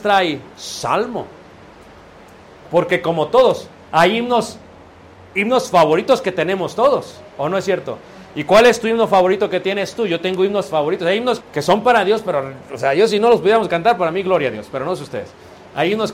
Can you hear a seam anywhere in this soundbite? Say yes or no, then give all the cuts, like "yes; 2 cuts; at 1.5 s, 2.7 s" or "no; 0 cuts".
yes; 1 cut; at 11.4 s